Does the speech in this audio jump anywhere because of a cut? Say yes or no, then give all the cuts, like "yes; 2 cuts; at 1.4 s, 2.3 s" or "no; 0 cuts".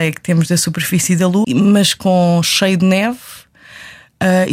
yes; 1 cut; at 1.4 s